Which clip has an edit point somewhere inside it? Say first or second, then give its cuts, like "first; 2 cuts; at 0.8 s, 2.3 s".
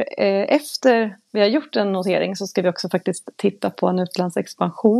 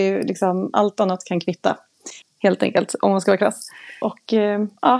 second; 1 cut; at 2.2 s